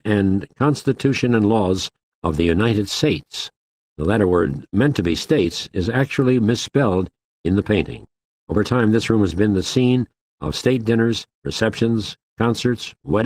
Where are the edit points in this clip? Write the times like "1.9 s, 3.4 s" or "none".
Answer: none